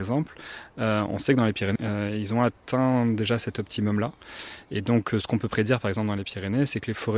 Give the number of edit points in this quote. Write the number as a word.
one